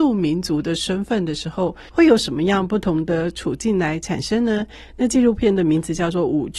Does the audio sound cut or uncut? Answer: cut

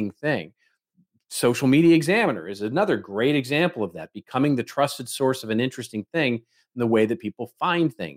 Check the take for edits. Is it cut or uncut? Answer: uncut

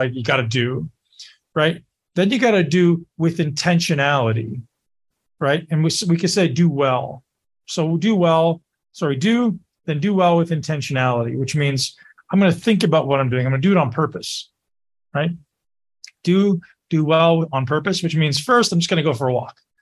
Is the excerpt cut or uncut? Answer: uncut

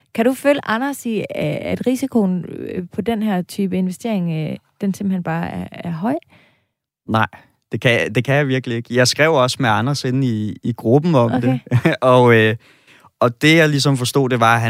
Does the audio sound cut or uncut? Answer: uncut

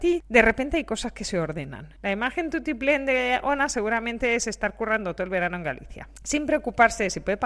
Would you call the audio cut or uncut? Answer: cut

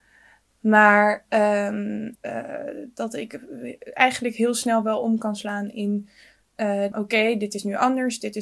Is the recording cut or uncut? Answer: cut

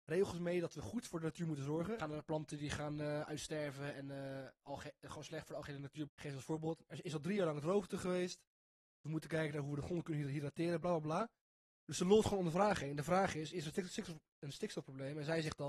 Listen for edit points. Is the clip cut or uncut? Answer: cut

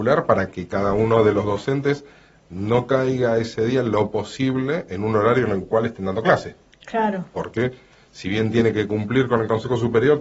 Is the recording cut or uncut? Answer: uncut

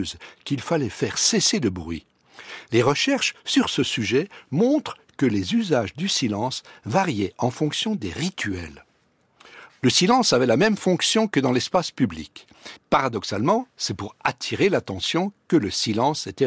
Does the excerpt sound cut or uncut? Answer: cut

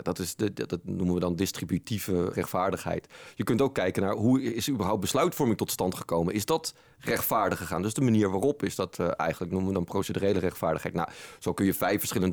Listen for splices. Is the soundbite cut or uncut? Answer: cut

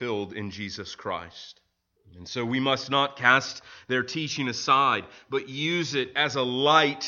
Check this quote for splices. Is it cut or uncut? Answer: cut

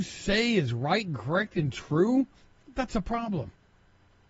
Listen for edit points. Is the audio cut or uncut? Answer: uncut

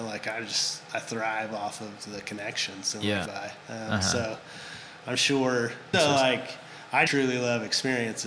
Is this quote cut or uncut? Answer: cut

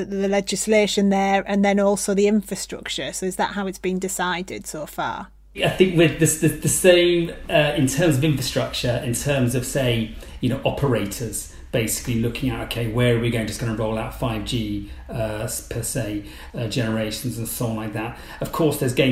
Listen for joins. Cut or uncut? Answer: cut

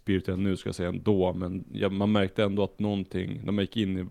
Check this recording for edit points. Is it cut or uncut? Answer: uncut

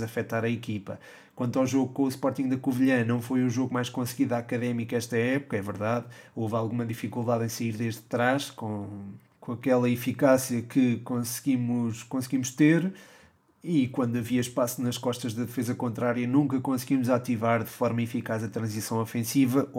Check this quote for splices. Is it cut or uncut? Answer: uncut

